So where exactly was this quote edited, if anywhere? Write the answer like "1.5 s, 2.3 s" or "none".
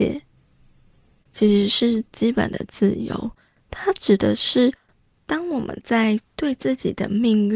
1.2 s